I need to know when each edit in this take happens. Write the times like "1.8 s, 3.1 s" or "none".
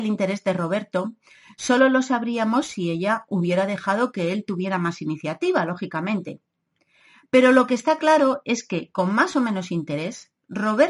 none